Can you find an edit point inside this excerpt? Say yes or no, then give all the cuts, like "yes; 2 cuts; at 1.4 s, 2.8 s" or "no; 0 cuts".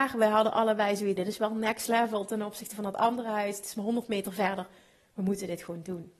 yes; 1 cut; at 1.2 s